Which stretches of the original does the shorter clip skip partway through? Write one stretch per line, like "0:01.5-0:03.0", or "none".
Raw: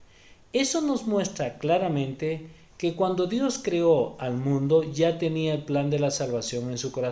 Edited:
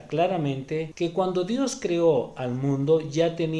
0:02.4-0:02.7